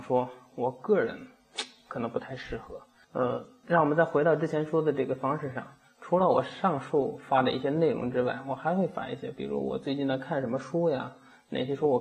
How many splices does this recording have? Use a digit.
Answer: 1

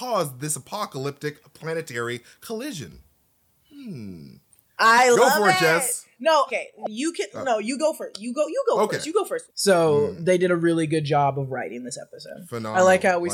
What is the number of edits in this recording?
2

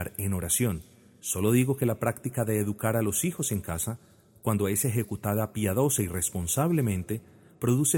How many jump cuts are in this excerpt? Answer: 1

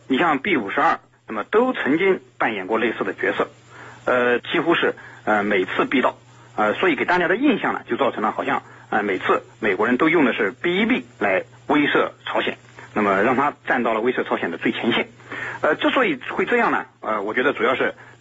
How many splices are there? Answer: 2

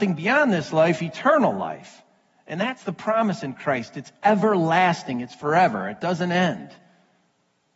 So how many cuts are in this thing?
0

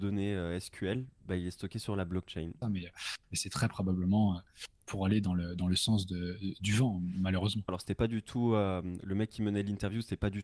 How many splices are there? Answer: 2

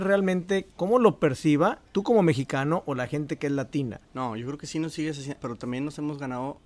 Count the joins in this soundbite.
2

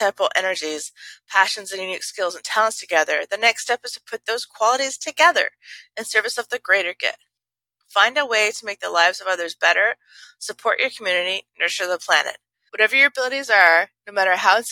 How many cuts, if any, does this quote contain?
1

